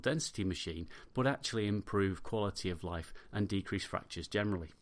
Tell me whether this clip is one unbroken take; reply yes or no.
yes